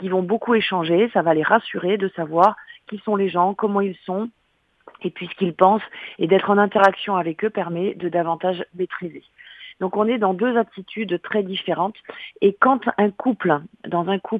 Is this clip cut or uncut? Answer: uncut